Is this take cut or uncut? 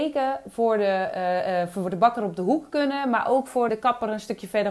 cut